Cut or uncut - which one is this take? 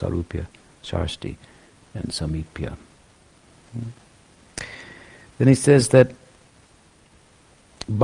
uncut